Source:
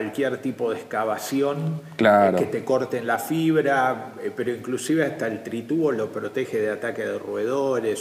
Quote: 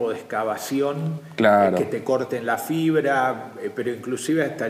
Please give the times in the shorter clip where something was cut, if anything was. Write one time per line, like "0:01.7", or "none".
none

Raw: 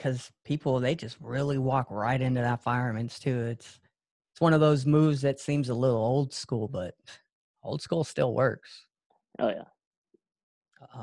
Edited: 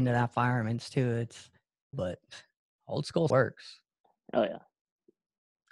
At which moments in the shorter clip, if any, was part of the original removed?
0:01.9
0:03.3

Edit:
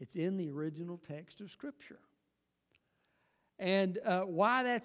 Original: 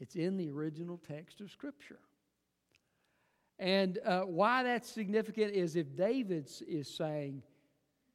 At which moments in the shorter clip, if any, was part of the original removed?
none

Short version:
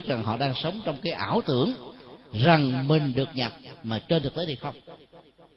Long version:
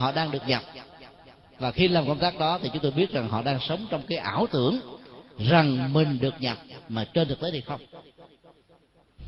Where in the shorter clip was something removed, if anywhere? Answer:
none

